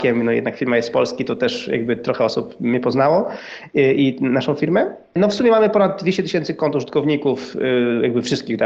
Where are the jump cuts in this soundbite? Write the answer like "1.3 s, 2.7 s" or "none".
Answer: none